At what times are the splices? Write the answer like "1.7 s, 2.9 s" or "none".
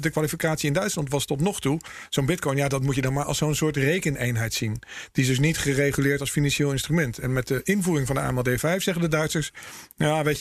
none